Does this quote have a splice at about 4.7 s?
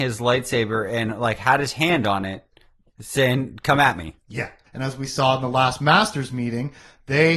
yes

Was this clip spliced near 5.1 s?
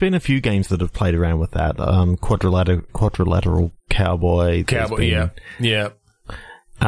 no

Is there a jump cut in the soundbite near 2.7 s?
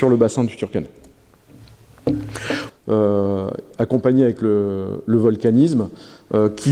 yes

